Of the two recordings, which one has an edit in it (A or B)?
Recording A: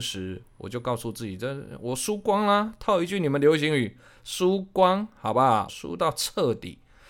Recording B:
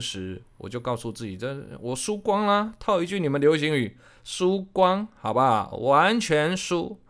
A